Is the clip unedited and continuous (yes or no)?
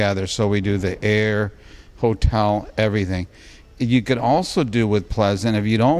yes